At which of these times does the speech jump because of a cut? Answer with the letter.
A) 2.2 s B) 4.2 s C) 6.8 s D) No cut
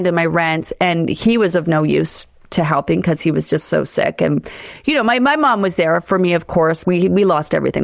C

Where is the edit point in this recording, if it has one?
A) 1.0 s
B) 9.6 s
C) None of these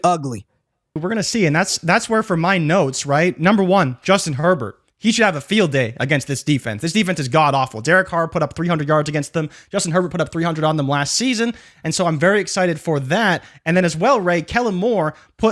A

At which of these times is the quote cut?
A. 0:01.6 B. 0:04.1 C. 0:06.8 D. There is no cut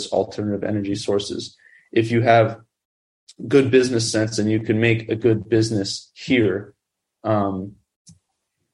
D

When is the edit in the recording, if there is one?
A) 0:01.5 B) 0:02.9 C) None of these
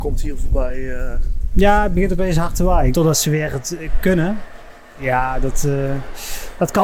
B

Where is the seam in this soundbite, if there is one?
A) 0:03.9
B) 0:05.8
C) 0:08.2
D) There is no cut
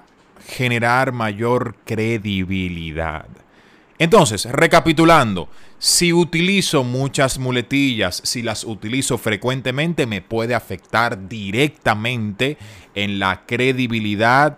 D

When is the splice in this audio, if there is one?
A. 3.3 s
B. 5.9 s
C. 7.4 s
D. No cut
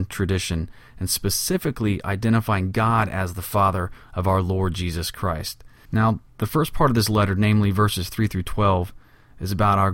B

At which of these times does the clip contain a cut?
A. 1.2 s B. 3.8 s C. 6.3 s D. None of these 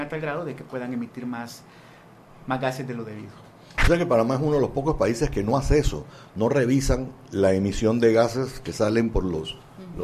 D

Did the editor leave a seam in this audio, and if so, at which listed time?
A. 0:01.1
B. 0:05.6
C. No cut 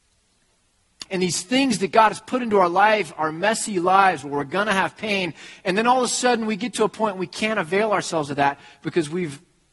A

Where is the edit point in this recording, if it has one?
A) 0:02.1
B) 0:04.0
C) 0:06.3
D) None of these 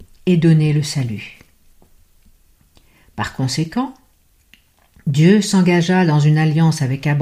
D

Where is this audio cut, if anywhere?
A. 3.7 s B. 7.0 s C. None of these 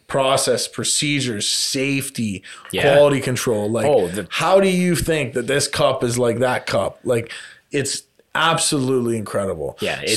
C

